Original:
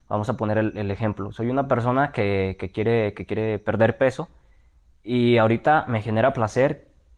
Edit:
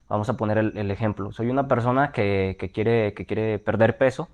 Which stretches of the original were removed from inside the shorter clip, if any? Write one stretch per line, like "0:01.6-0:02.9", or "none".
none